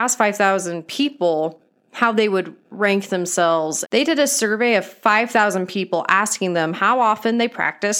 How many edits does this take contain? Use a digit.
1